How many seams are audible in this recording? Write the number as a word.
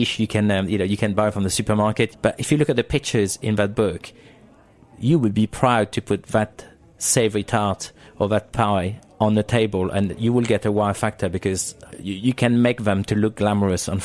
two